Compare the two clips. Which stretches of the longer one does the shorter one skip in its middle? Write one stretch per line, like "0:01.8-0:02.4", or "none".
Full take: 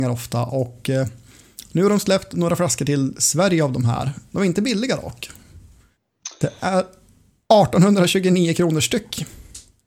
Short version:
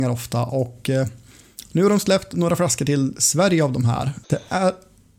0:04.2-0:06.3